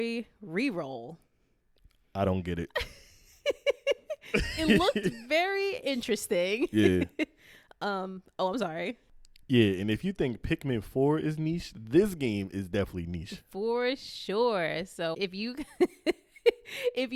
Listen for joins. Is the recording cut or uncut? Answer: cut